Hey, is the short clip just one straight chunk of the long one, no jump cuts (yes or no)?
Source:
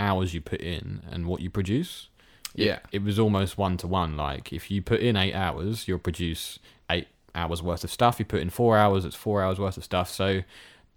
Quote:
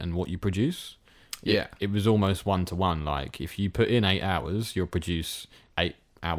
yes